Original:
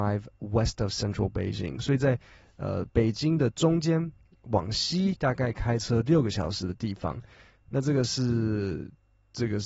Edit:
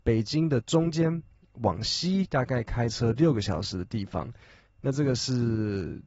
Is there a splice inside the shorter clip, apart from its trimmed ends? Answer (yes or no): no